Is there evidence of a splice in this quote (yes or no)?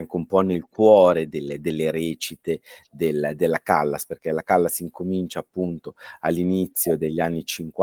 no